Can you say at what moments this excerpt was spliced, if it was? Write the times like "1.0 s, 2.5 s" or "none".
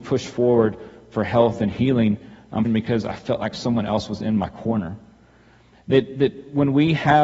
2.6 s